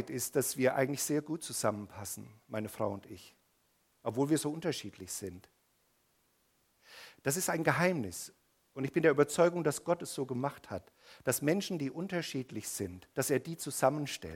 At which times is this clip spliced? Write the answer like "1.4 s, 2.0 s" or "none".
13.1 s